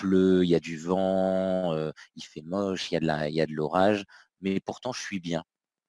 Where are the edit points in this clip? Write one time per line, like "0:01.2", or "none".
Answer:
none